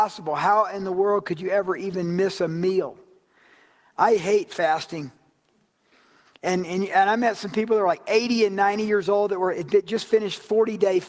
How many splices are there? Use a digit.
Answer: 1